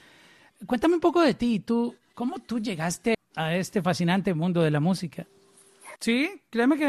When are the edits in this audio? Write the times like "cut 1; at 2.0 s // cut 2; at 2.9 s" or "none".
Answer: cut 1; at 3.1 s // cut 2; at 6.0 s